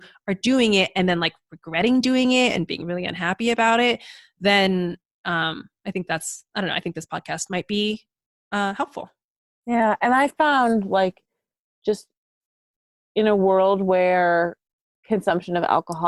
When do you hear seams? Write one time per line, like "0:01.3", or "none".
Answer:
none